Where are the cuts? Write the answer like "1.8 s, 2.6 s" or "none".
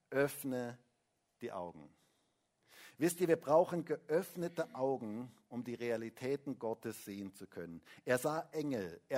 none